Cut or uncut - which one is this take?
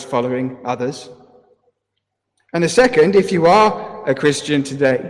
uncut